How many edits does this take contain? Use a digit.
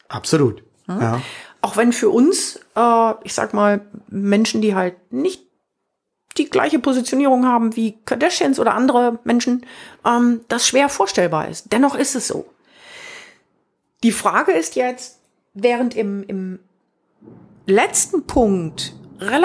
0